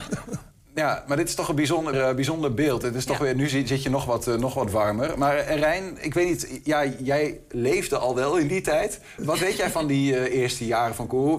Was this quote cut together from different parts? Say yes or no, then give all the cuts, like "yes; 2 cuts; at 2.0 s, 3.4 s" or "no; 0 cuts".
yes; 2 cuts; at 1.9 s, 9.2 s